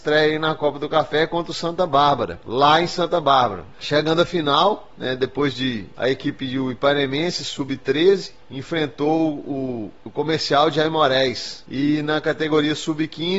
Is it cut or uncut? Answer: cut